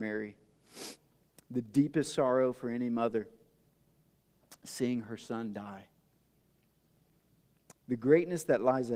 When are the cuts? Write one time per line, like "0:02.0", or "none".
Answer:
none